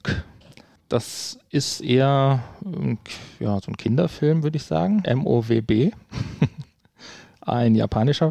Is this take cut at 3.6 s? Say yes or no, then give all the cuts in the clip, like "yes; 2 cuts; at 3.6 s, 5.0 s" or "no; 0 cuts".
no; 1 cut; at 5.0 s